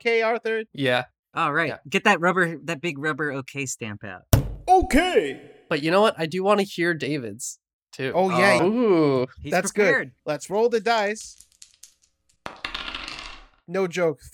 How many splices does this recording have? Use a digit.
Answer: 1